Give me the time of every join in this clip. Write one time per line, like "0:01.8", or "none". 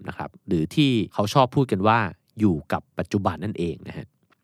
0:03.4